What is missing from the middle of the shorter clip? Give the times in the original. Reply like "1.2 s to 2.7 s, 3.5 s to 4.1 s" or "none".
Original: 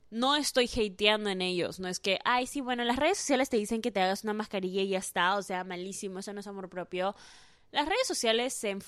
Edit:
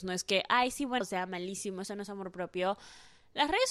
2.8 s to 5.4 s